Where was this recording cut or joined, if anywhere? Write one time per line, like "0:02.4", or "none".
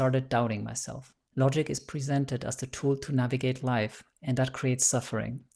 0:01.2